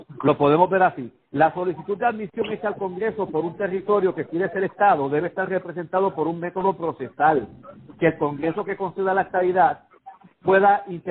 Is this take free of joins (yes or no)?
yes